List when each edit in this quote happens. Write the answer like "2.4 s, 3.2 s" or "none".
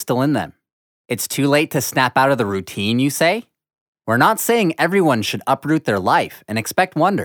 3.9 s